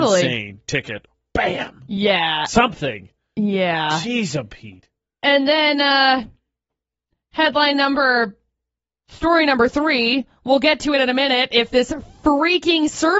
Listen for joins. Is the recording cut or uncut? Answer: uncut